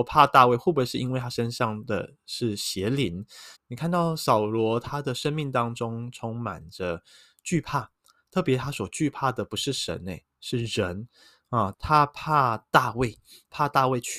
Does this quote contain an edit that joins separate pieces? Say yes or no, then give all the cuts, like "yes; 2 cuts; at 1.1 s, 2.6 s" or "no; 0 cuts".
yes; 2 cuts; at 3.5 s, 11.7 s